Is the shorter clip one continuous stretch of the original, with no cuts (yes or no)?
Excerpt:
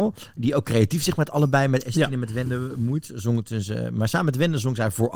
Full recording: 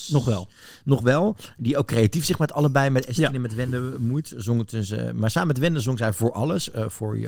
yes